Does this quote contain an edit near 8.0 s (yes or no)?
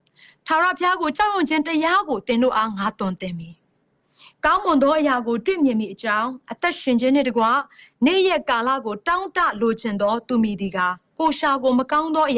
no